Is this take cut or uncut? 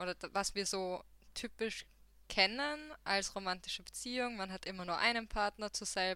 uncut